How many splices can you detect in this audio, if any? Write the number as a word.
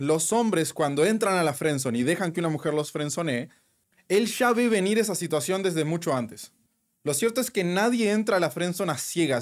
zero